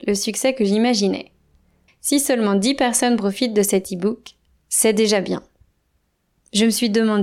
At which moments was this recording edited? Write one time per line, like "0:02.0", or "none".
0:01.9